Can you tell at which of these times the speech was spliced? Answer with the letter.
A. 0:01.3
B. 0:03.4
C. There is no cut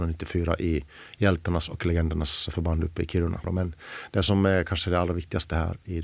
B